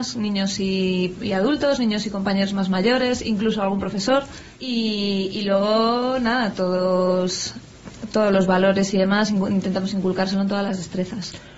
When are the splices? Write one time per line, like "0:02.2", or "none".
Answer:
0:04.5